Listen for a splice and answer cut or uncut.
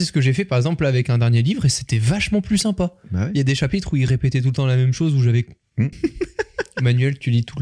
cut